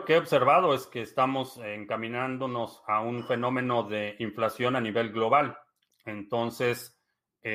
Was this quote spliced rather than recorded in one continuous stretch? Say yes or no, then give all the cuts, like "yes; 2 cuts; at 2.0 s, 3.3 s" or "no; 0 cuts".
yes; 1 cut; at 5.9 s